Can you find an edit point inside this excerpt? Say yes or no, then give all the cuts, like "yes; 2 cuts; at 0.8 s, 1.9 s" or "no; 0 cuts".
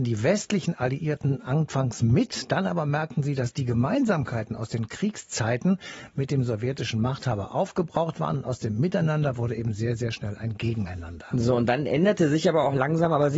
no; 0 cuts